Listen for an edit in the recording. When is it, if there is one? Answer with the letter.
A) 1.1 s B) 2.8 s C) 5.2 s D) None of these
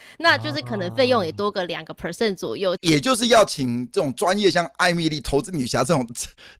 B